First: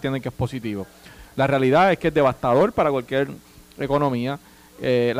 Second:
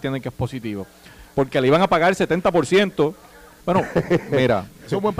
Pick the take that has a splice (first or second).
second